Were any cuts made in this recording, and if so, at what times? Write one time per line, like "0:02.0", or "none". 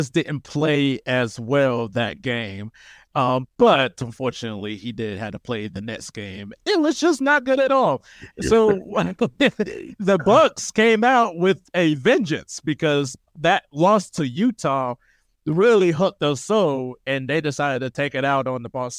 0:06.5

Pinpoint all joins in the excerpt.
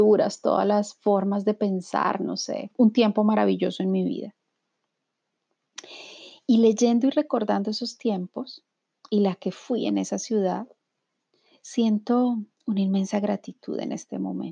0:02.7

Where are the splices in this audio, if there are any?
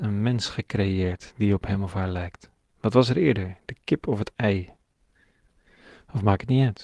none

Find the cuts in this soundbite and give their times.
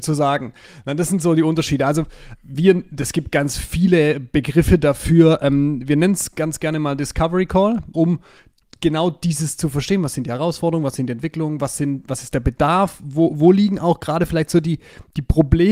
0:02.3
0:07.9

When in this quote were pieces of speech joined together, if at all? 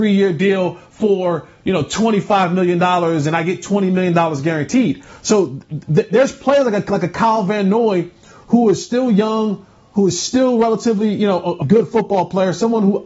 0:11.6

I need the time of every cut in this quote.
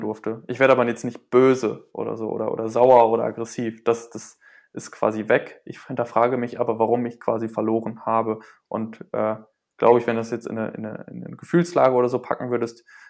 none

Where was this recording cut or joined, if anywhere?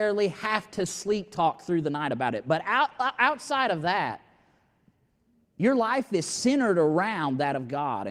none

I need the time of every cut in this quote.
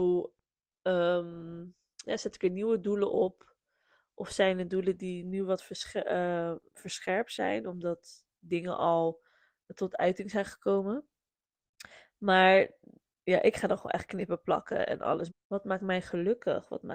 0:15.3

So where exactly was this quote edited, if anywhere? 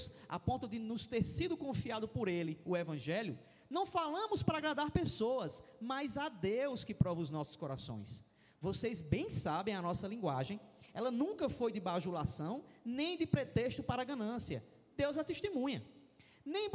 none

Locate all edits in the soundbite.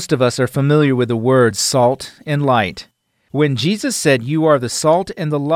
none

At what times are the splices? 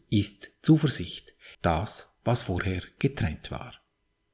0:01.5

